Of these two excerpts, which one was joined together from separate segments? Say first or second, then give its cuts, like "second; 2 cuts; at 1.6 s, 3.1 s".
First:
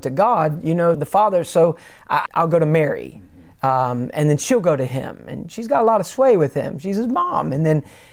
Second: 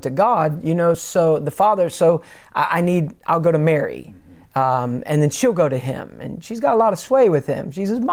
first; 2 cuts; at 0.9 s, 2.3 s